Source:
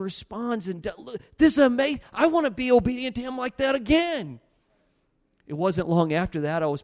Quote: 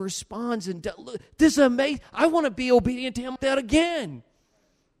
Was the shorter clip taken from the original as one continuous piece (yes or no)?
no